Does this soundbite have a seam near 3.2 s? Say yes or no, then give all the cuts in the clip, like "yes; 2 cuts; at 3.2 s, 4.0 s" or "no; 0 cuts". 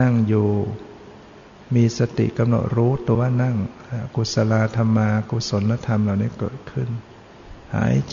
yes; 1 cut; at 3.2 s